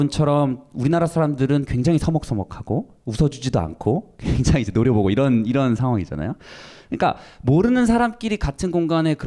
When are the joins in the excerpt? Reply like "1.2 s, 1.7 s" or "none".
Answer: none